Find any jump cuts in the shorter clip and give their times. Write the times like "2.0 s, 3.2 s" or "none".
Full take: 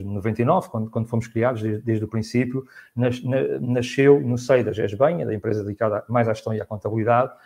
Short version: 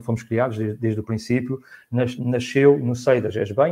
2.2 s